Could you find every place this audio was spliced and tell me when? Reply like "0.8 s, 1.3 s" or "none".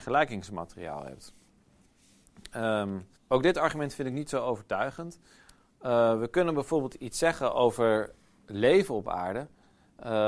3.2 s